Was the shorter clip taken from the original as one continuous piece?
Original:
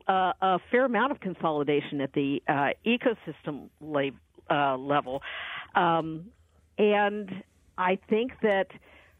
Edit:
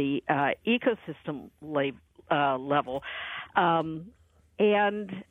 yes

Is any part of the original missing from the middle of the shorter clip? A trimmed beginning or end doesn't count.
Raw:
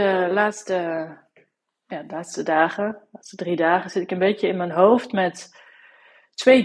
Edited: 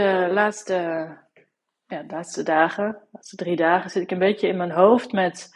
no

